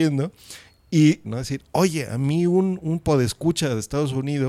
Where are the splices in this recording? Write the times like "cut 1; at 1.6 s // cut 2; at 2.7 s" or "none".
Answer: cut 1; at 1.2 s